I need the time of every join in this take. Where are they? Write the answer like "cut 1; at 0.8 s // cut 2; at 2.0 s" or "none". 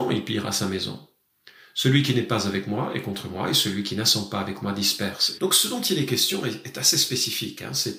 cut 1; at 5.4 s

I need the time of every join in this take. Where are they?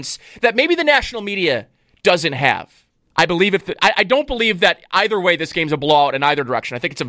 cut 1; at 3.0 s

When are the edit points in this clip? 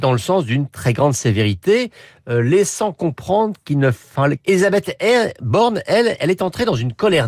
cut 1; at 4.4 s

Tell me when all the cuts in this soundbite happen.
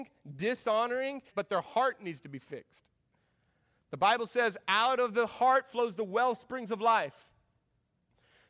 cut 1; at 1.3 s

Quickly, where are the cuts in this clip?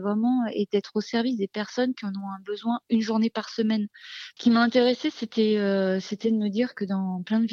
cut 1; at 4.4 s

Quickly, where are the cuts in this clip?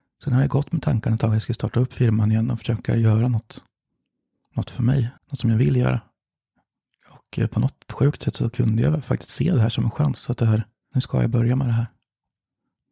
cut 1; at 5.2 s // cut 2; at 10.9 s

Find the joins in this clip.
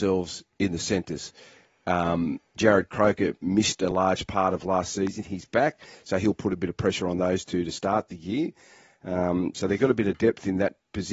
cut 1; at 2.6 s

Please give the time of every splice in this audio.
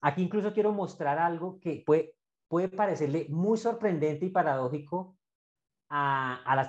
none

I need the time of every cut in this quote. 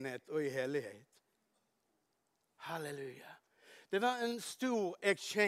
none

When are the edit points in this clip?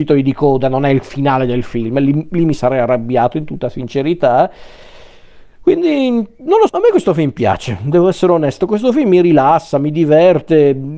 cut 1; at 6.7 s

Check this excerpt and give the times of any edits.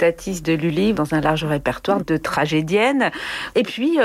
cut 1; at 0.9 s // cut 2; at 2.0 s

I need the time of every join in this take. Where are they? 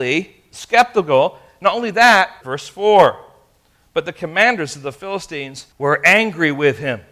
cut 1; at 2.4 s // cut 2; at 5.7 s

